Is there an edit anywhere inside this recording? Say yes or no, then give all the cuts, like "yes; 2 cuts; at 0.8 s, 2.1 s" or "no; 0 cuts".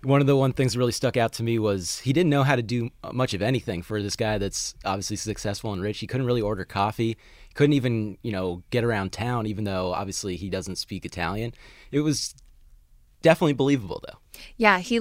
no; 0 cuts